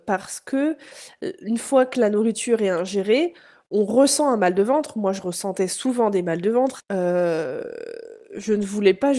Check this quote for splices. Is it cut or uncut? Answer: cut